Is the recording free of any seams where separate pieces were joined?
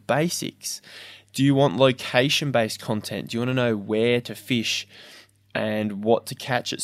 yes; 0 cuts

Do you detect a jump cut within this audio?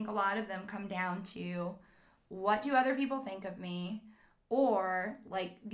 no; 0 cuts

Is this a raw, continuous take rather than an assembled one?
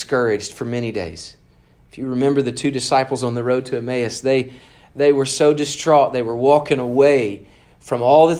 yes; 0 cuts

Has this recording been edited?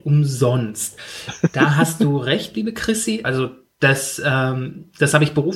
yes; 1 cut; at 3.2 s

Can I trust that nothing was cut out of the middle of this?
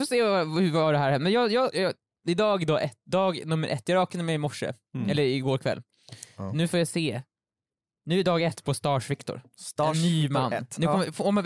yes; 0 cuts

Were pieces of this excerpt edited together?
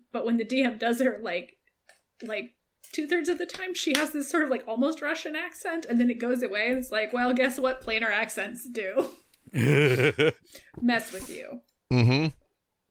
no; 0 cuts

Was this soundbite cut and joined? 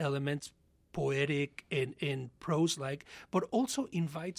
no; 0 cuts

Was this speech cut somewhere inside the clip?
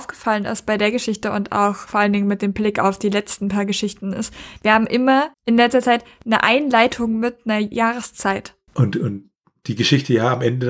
yes; 2 cuts; at 5.3 s, 8.7 s

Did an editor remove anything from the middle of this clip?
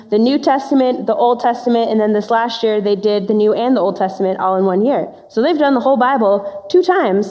no; 0 cuts

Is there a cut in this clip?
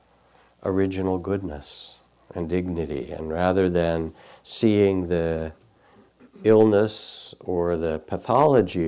no; 0 cuts

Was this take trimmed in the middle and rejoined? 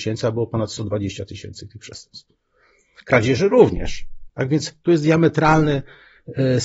yes; 1 cut; at 4.3 s

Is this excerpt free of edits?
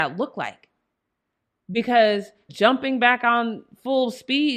no; 1 cut; at 2.5 s

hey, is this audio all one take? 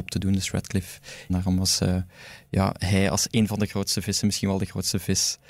yes; 0 cuts

